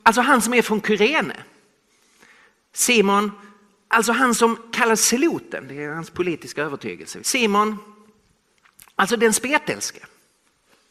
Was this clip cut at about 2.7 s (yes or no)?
no